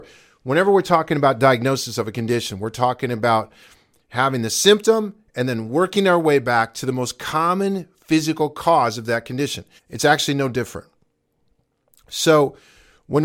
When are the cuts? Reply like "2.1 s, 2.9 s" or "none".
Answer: 9.8 s